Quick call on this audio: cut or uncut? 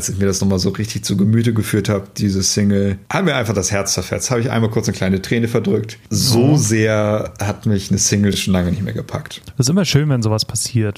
uncut